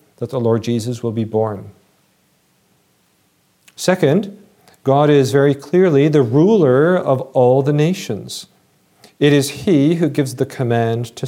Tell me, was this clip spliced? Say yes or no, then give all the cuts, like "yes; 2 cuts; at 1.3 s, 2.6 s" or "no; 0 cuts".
no; 0 cuts